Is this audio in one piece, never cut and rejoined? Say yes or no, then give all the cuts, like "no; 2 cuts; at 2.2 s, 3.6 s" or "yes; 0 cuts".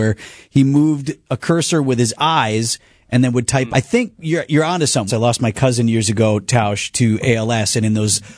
no; 2 cuts; at 3.7 s, 5.1 s